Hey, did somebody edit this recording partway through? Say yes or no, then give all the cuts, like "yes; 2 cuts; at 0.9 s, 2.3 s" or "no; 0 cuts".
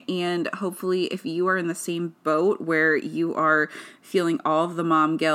no; 0 cuts